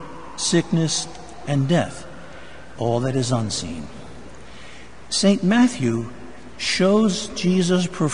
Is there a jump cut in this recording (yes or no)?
yes